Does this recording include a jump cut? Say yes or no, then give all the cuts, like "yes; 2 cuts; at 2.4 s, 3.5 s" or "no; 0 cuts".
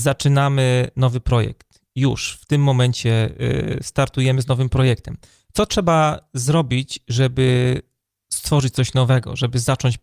no; 0 cuts